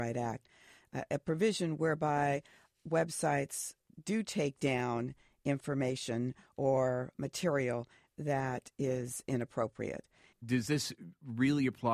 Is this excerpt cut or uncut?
cut